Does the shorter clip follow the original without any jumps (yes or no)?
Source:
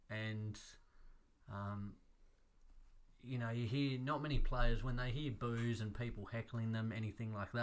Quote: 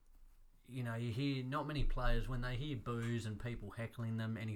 yes